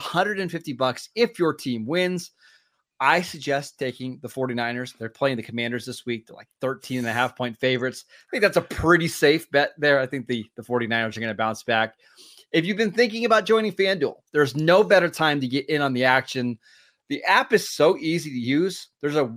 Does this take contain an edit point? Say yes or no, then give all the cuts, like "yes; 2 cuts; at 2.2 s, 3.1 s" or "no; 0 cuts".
no; 0 cuts